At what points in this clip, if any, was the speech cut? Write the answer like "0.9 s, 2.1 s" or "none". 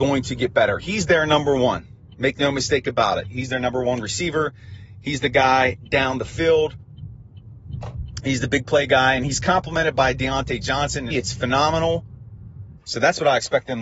11.1 s, 12.8 s